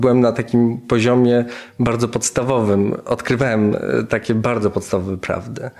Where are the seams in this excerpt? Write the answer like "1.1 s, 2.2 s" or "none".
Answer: none